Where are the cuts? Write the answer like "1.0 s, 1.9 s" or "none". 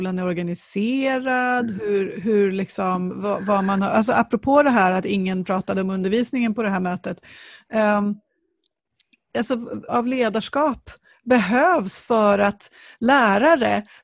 9.9 s